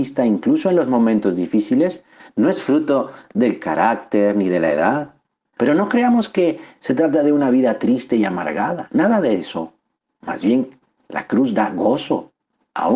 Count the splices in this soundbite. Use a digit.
1